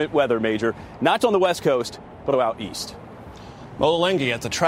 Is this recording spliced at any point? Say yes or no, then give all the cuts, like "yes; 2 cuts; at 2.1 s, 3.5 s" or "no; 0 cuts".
yes; 2 cuts; at 1.2 s, 2.3 s